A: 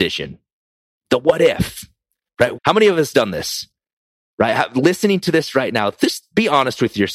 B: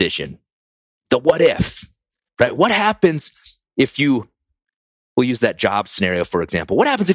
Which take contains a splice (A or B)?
A